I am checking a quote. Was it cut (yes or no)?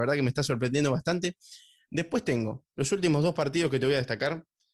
no